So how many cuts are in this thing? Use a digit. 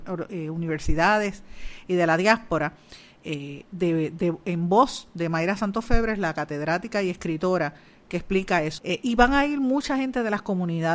1